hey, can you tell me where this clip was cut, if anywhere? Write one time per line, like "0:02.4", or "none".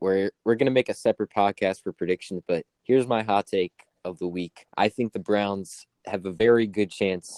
0:02.7
0:04.7